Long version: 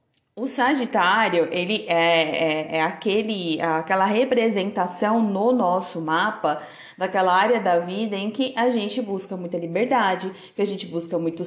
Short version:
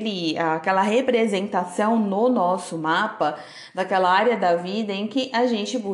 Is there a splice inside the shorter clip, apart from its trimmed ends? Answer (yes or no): no